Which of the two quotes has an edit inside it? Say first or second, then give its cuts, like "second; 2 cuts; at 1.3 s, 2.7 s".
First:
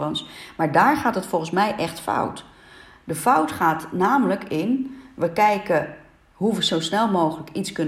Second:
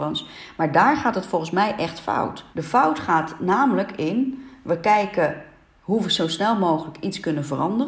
second; 1 cut; at 2.5 s